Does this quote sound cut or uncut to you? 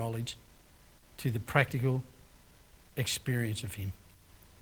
uncut